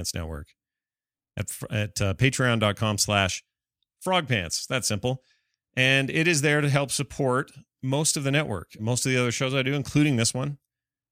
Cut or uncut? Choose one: cut